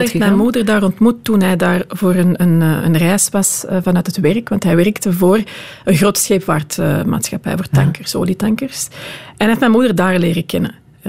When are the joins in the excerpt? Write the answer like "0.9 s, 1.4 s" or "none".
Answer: none